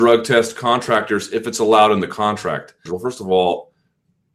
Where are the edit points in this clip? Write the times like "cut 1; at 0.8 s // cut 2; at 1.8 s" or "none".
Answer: cut 1; at 2.9 s